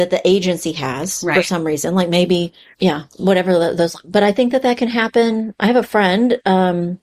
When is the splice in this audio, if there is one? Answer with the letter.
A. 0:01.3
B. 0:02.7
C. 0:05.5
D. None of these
B